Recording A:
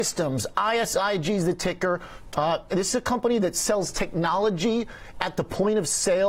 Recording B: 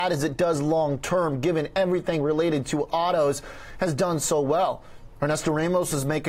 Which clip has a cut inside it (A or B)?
A